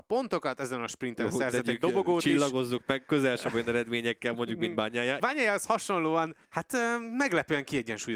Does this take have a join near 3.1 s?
no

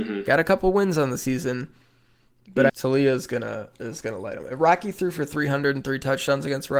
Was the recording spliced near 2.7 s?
yes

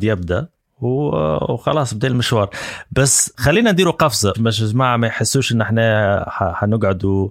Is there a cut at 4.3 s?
yes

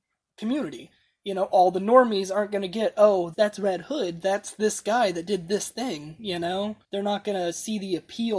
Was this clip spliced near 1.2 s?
no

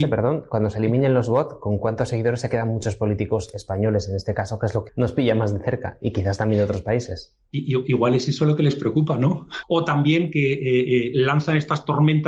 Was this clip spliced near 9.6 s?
yes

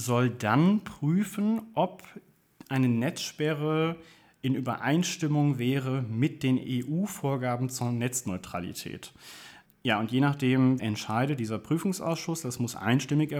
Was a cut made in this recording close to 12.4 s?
no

